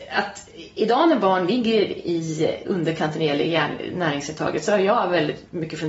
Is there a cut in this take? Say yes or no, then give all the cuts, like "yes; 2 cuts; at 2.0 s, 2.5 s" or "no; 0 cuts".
no; 0 cuts